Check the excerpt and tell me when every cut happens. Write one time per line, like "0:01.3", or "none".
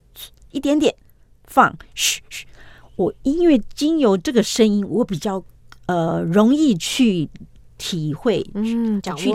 none